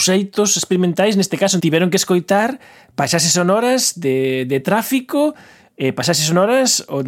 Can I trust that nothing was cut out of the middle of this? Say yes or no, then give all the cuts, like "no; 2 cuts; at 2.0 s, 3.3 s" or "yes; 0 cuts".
no; 1 cut; at 1.6 s